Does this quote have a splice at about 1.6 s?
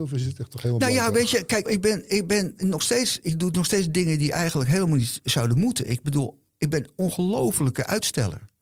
yes; 1 cut; at 1.6 s

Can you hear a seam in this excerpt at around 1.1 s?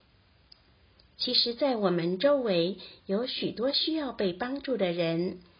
no; 0 cuts

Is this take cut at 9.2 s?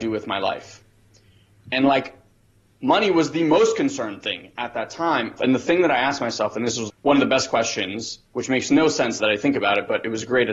yes; 3 cuts; at 5.4 s, 6.9 s, 9.2 s

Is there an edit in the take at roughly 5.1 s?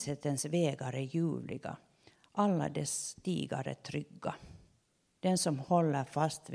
yes; 1 cut; at 5.1 s

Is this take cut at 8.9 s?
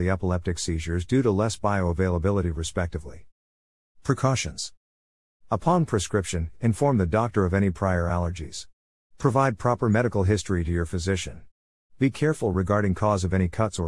no; 0 cuts

